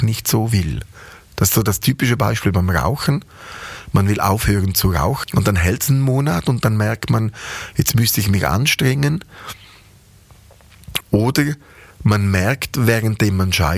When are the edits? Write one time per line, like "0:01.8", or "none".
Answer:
0:05.2
0:11.0